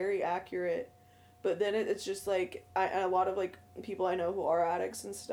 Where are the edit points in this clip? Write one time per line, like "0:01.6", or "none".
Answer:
none